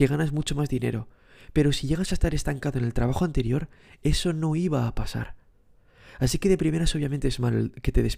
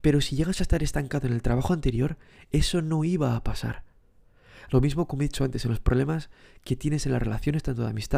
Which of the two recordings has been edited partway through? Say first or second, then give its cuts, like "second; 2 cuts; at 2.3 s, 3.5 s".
second; 1 cut; at 4.7 s